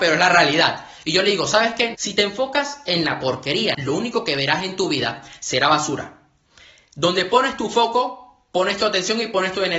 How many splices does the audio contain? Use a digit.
2